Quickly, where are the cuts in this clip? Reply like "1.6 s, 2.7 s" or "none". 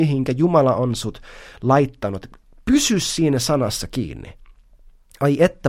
none